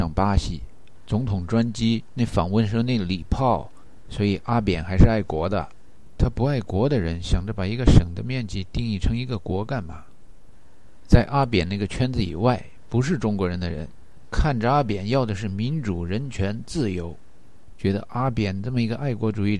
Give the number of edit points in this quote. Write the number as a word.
zero